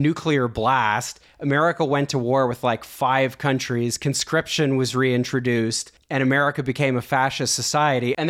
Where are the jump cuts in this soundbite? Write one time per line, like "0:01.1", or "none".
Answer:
none